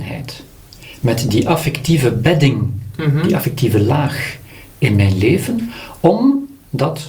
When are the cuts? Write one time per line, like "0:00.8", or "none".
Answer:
none